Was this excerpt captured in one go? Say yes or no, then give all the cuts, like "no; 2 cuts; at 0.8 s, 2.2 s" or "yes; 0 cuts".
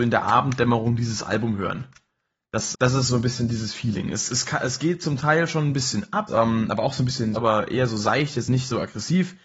no; 3 cuts; at 2.7 s, 6.3 s, 7.4 s